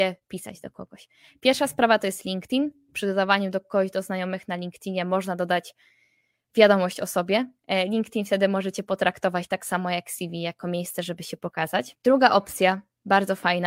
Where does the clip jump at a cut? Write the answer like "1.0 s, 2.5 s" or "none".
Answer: 12.0 s